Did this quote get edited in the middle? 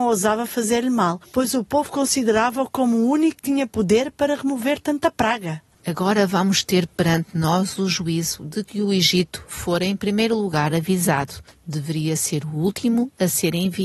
yes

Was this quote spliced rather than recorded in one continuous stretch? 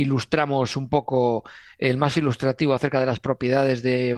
no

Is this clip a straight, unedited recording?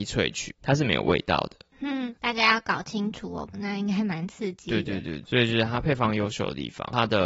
no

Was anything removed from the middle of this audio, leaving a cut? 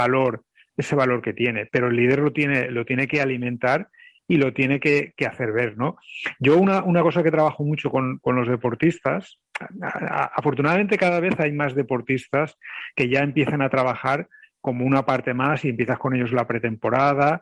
no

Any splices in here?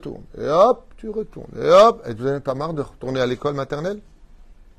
no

